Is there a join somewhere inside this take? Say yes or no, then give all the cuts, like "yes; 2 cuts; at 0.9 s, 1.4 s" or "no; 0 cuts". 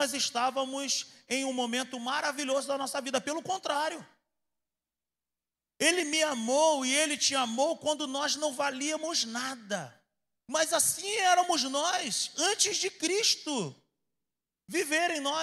yes; 1 cut; at 10.4 s